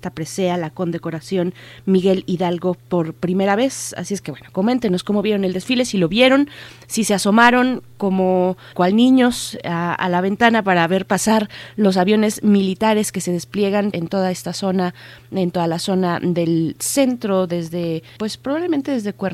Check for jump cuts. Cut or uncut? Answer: cut